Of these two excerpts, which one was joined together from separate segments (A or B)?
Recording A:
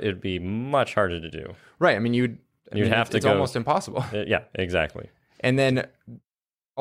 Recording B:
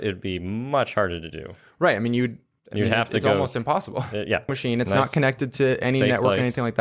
B